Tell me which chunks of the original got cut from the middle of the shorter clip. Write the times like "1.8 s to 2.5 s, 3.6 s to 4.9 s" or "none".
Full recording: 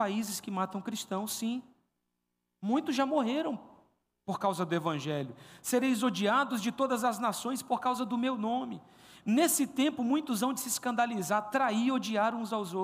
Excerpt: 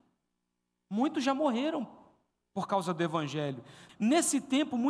5.6 s to 9.2 s